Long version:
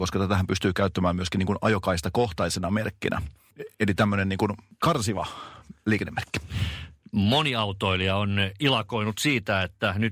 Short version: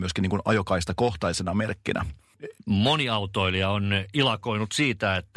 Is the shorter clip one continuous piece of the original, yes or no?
no